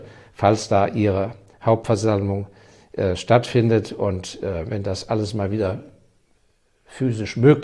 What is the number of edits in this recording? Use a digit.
0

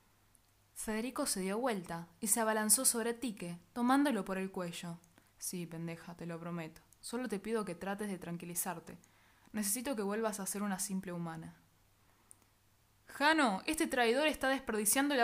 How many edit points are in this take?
1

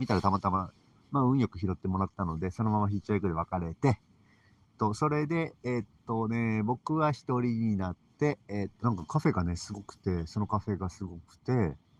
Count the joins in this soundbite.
2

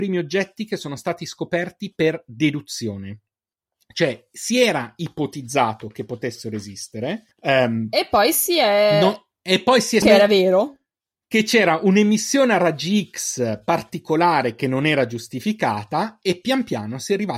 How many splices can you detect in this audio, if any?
2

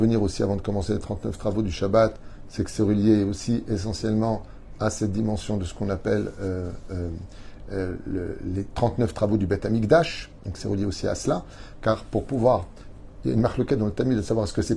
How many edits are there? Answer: 0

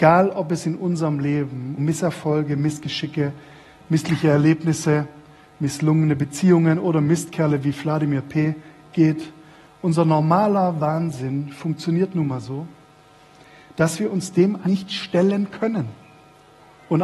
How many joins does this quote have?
2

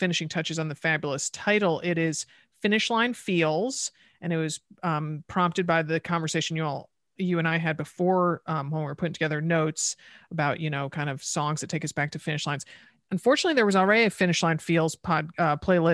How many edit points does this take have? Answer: 0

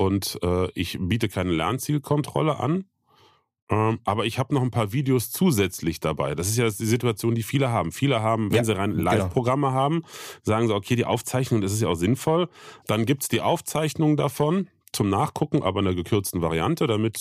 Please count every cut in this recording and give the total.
1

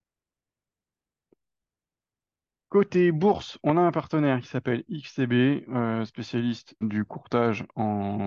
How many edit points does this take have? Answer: 1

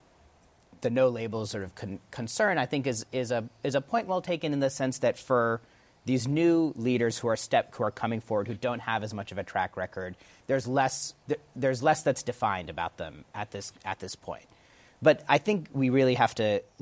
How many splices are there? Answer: 1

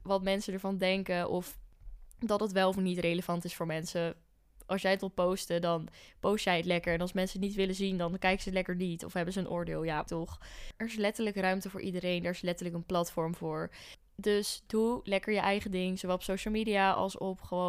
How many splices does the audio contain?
1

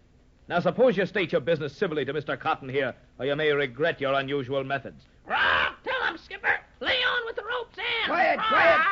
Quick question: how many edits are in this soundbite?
0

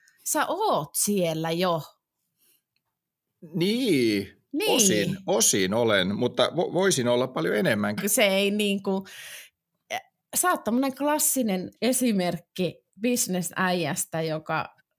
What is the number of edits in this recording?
2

